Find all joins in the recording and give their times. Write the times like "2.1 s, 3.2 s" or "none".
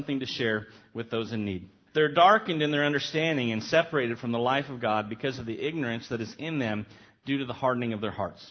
1.9 s